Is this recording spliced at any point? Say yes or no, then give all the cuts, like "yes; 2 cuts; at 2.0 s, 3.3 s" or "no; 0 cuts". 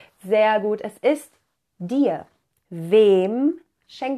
yes; 1 cut; at 2.5 s